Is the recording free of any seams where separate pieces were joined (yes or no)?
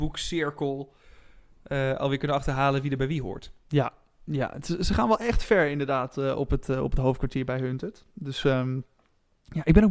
yes